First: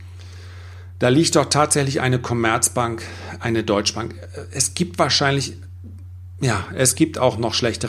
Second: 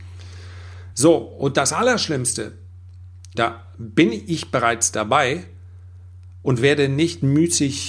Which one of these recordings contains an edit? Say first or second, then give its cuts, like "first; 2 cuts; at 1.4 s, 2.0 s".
second; 2 cuts; at 0.9 s, 3.3 s